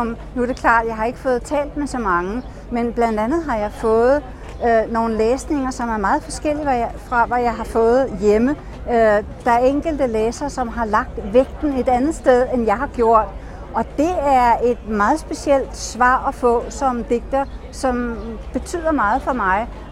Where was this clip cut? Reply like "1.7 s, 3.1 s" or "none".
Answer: none

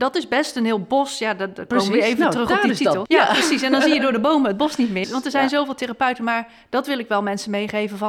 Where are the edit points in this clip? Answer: 3.1 s, 5.0 s

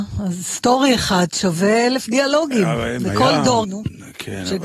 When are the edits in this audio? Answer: 3.6 s

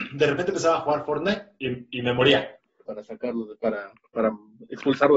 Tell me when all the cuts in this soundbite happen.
2.8 s

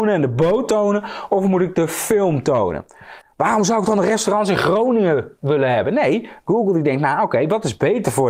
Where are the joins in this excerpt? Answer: 3.2 s

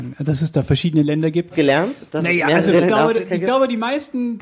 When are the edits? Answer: 1.5 s, 2.8 s

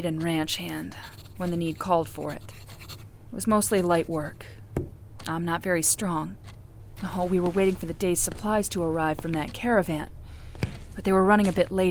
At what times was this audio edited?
7.0 s

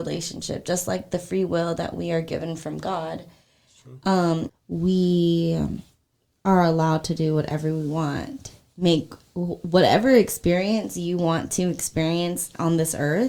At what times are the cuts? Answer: 4.5 s

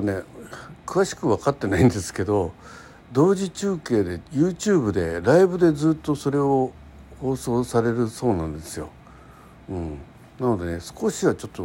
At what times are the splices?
none

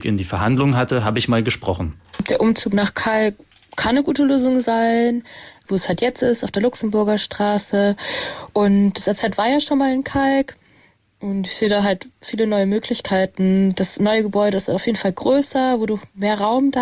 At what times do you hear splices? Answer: 5.6 s

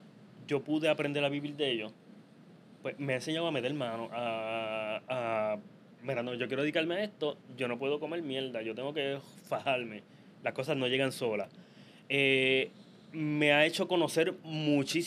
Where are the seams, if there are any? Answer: none

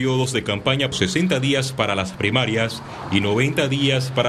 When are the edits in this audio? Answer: 0.9 s

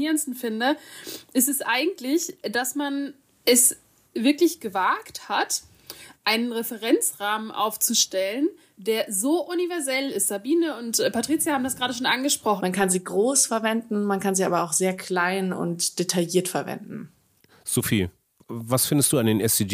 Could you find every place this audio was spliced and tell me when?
12.6 s

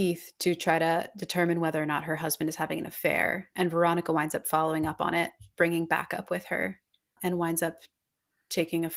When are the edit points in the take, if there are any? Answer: 7.2 s

